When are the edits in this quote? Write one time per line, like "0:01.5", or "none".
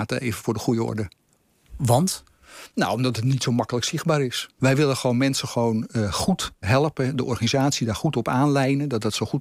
0:04.6
0:06.6